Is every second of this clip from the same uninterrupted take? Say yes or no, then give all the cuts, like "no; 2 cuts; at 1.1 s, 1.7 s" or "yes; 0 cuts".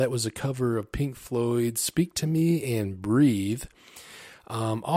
yes; 0 cuts